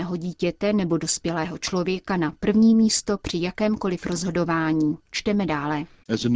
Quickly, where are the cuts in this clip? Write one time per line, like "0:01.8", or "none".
none